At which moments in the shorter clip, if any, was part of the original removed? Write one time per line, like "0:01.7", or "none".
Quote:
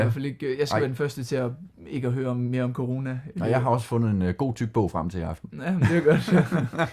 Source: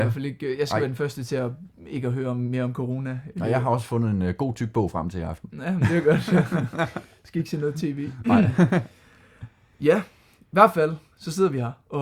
none